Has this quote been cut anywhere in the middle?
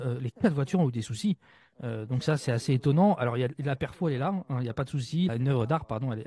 yes; 1 cut; at 5.3 s

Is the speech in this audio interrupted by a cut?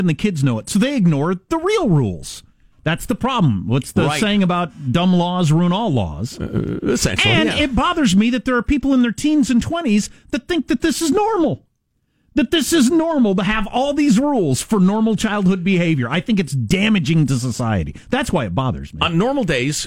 no; 0 cuts

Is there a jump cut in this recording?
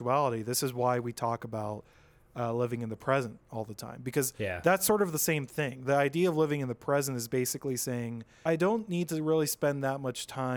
yes; 1 cut; at 8.5 s

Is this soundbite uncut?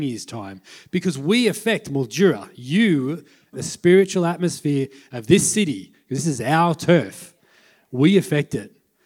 no; 1 cut; at 3.5 s

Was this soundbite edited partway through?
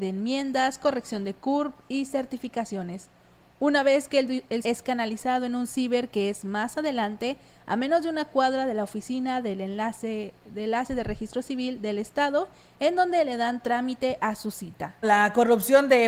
yes; 2 cuts; at 4.6 s, 15.0 s

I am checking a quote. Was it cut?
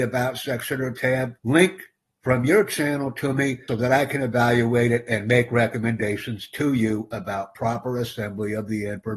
yes; 2 cuts; at 1.4 s, 3.7 s

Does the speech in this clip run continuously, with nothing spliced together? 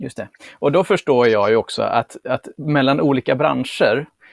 yes; 0 cuts

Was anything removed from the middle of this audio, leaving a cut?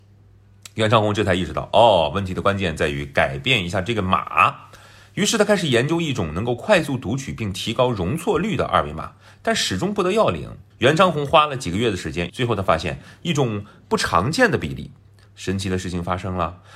yes; 3 cuts; at 10.7 s, 12.3 s, 15.2 s

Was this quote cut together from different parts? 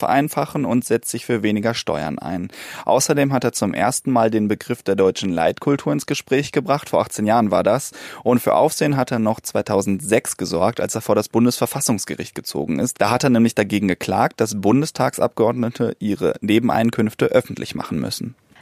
no; 0 cuts

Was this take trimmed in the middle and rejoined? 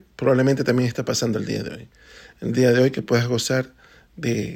no; 0 cuts

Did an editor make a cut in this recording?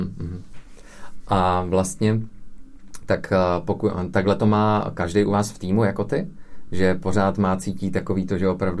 no; 0 cuts

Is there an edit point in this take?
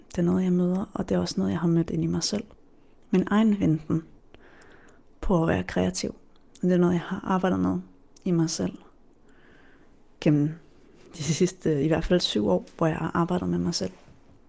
no; 0 cuts

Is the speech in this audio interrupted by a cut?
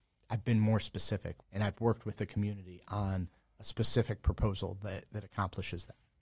yes; 1 cut; at 1.4 s

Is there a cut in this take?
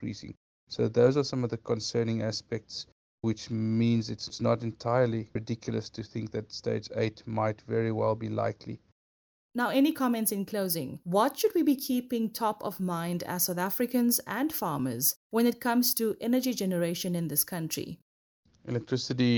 no; 0 cuts

